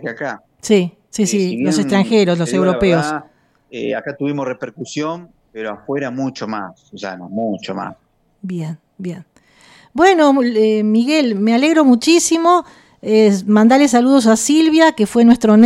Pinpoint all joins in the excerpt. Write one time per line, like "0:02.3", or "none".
none